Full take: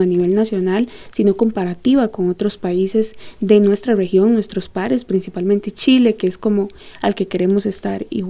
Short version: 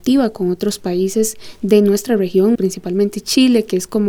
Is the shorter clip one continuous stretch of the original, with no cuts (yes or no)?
no